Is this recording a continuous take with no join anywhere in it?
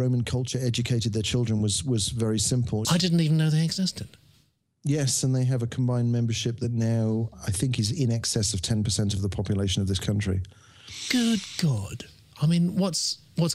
no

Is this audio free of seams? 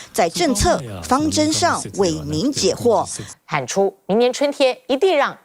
no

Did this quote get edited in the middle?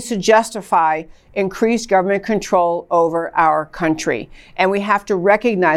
no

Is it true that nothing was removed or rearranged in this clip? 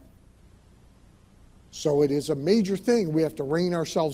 no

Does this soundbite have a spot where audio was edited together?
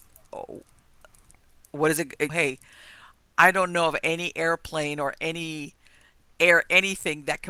yes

